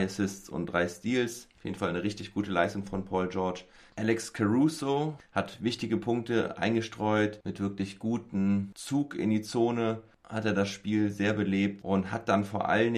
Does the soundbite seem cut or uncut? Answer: cut